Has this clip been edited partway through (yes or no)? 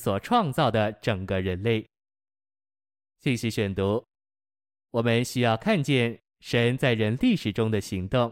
no